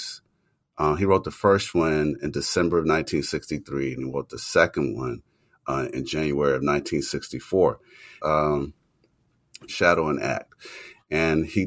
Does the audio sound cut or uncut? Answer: cut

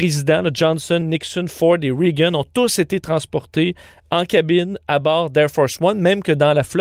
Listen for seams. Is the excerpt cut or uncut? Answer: uncut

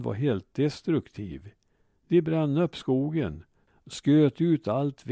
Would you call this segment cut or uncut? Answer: uncut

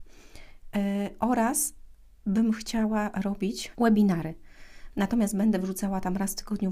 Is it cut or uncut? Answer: cut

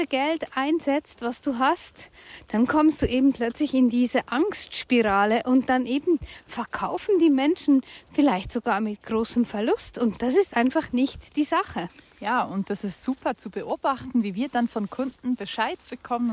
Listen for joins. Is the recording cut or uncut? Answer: uncut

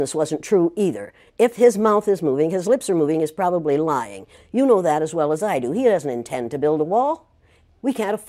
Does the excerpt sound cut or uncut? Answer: uncut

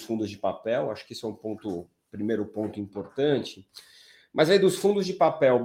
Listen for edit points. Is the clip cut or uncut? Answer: uncut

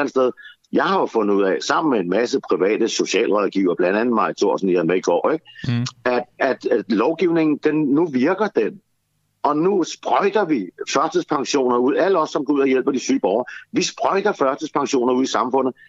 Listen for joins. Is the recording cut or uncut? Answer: uncut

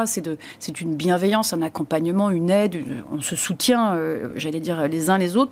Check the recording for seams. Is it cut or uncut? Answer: uncut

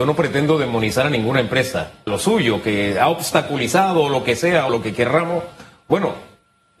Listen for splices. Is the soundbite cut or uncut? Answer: cut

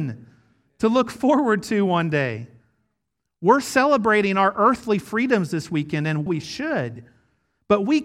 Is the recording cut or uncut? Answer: cut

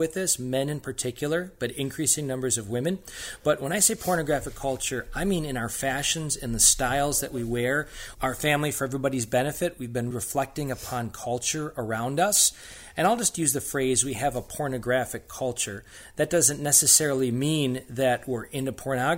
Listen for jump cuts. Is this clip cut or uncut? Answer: cut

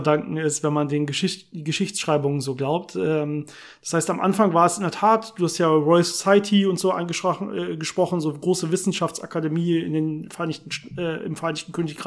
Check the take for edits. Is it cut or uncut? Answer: uncut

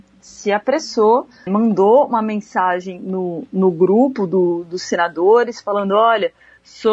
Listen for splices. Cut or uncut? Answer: cut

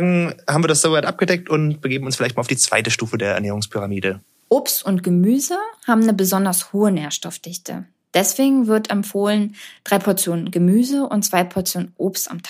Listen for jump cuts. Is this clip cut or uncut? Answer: uncut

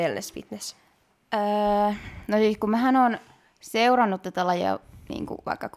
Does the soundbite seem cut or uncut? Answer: uncut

